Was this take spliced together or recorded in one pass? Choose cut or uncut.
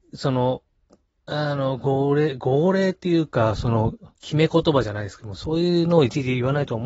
cut